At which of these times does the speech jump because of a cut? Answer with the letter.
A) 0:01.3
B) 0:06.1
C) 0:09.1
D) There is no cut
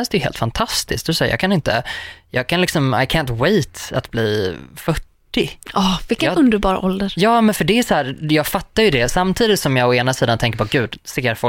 D